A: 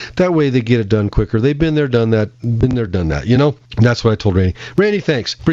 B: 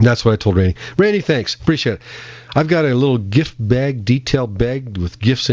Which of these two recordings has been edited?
A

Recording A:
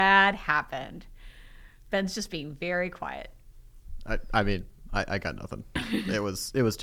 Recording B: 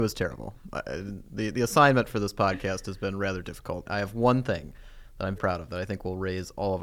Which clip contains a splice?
B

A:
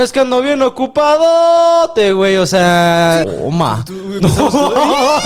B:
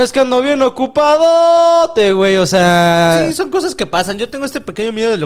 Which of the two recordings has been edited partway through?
A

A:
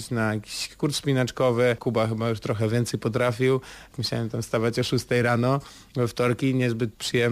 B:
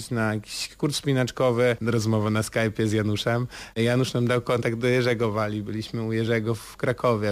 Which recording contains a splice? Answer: B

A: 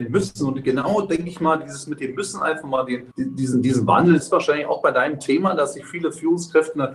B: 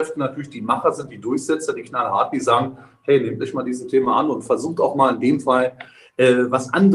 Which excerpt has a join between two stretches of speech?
A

